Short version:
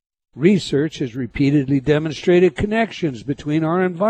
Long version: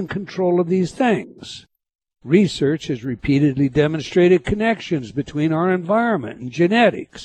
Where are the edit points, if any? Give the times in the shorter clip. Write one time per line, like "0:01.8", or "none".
none